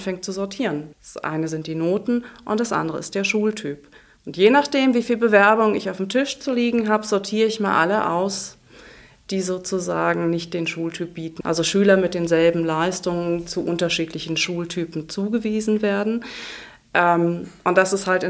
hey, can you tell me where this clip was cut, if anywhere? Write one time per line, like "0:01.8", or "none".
0:00.9
0:11.4